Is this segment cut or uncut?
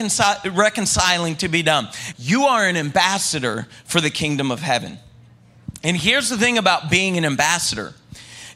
cut